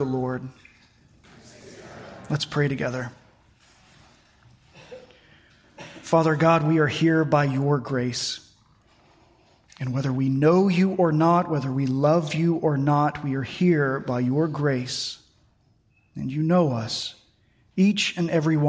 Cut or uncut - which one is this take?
uncut